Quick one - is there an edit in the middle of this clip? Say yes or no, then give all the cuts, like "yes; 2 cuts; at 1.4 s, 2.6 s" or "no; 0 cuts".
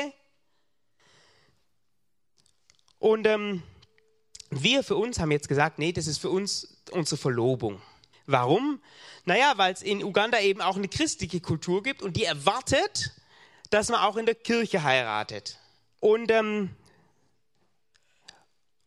yes; 2 cuts; at 8.1 s, 15.9 s